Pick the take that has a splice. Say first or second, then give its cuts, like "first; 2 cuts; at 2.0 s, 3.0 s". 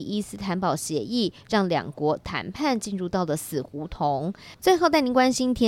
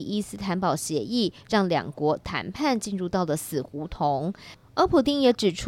first; 1 cut; at 4.6 s